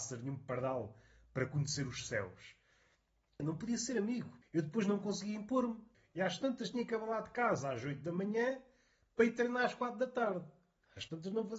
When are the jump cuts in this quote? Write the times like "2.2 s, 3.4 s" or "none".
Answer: none